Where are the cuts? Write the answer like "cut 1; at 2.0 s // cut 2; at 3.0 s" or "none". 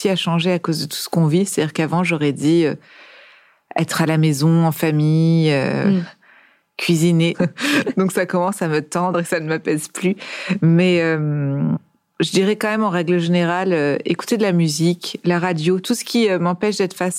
cut 1; at 7.3 s